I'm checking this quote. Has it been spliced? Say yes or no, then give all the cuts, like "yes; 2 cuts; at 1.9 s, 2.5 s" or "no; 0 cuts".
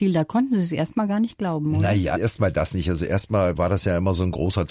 no; 0 cuts